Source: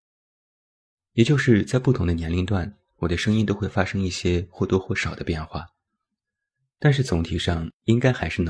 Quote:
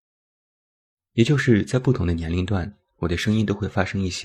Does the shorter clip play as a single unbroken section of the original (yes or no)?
yes